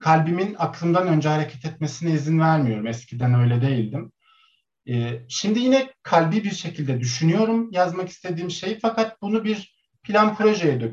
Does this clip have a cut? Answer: no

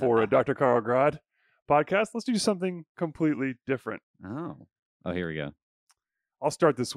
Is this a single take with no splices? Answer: no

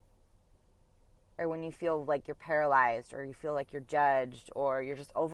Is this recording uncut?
yes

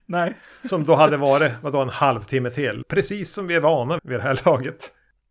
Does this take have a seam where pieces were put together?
yes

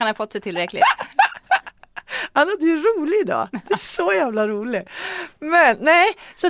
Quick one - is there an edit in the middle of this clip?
no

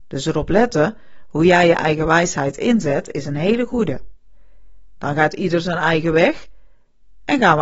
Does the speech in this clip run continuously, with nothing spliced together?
no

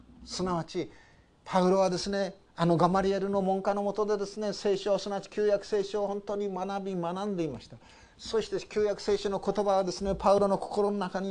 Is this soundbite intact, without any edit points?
yes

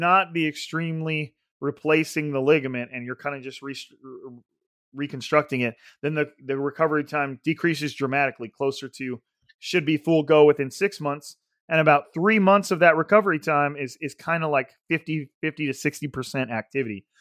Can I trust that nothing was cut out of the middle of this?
yes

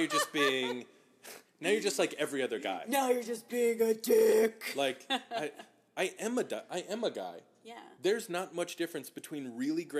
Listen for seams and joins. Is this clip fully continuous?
yes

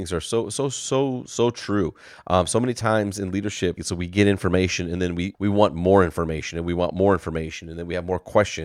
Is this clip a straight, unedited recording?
no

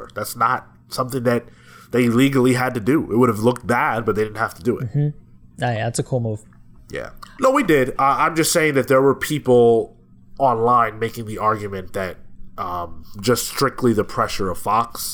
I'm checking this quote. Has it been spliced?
yes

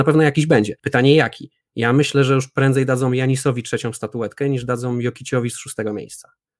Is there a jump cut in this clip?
no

